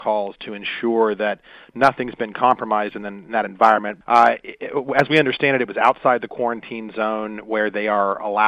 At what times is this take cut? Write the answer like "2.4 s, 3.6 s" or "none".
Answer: 4.0 s